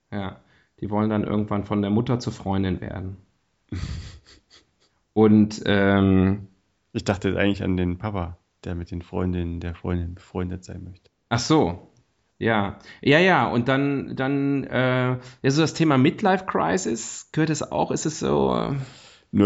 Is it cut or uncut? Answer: uncut